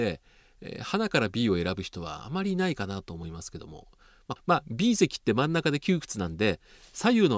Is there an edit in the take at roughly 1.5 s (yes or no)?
no